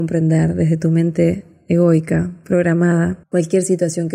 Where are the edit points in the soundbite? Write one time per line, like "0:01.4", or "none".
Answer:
0:03.2